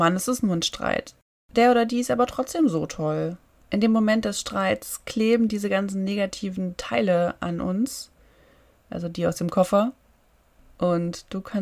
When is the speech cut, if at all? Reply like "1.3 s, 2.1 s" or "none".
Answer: none